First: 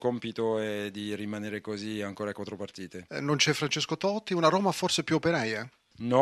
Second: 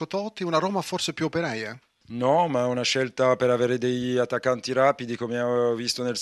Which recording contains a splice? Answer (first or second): first